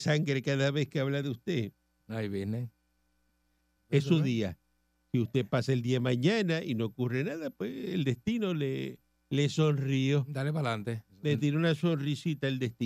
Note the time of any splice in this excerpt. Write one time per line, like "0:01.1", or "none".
0:03.8